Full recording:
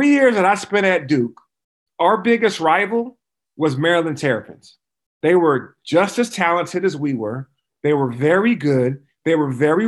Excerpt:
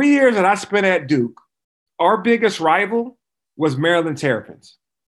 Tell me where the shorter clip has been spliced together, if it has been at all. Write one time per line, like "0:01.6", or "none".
none